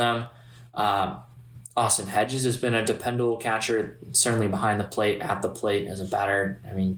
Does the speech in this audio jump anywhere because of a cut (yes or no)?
no